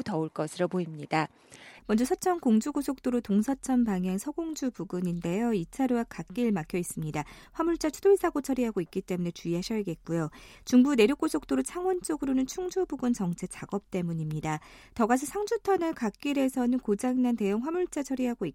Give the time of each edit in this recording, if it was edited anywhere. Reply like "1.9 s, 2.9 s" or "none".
1.8 s

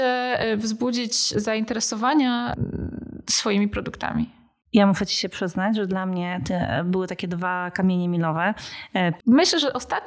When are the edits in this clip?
9.2 s

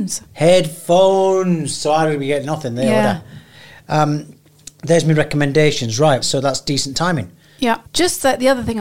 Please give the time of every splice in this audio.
6.2 s, 7.9 s

